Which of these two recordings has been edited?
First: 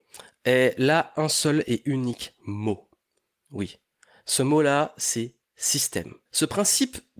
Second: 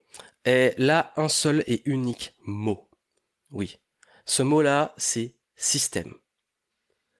first; 1 cut; at 6.3 s

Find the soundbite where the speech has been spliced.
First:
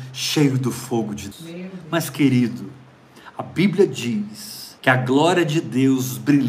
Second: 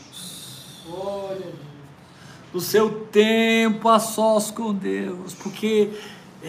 first; 2 cuts; at 1.3 s, 4.8 s

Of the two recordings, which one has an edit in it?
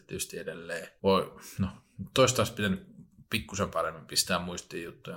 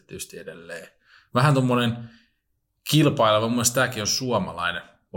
first; 1 cut; at 1.0 s

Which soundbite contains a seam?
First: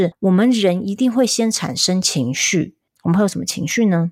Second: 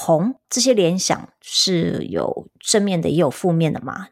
first; 1 cut; at 2.9 s

